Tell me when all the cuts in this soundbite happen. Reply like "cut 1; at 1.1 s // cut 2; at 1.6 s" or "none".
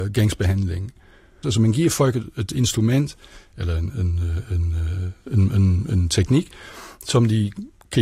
cut 1; at 1.4 s